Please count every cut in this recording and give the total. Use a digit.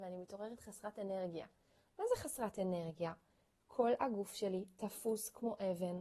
0